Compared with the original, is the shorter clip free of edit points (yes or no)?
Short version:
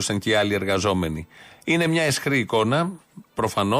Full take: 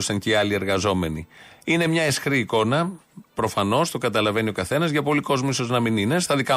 yes